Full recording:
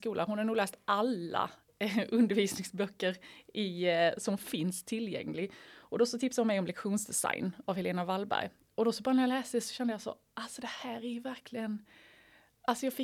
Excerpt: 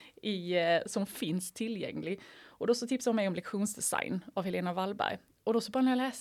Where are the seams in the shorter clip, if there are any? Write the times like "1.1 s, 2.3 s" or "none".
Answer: none